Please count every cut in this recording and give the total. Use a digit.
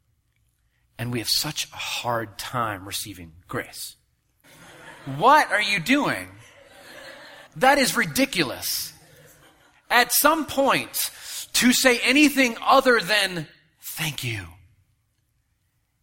2